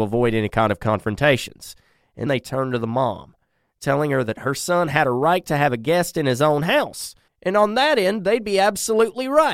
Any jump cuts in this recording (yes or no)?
yes